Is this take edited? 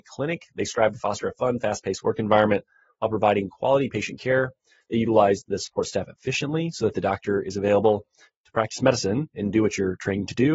no; 0 cuts

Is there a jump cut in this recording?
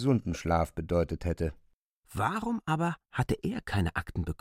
no; 0 cuts

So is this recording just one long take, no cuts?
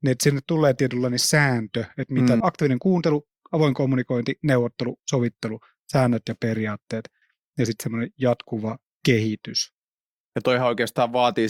no; 1 cut; at 2.4 s

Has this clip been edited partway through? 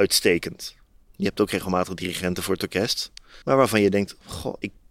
yes; 1 cut; at 3.4 s

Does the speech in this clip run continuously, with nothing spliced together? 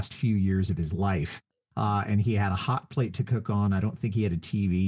yes; 0 cuts

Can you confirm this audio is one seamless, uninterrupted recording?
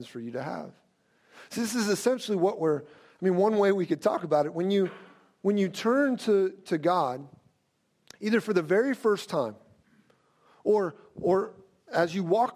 yes; 0 cuts

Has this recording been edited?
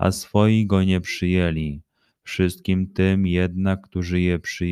no; 0 cuts

